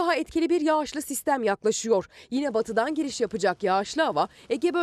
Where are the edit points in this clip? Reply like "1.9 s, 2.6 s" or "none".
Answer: none